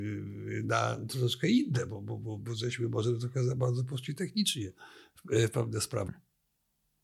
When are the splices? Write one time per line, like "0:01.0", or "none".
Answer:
0:06.1